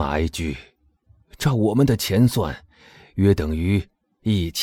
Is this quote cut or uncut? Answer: uncut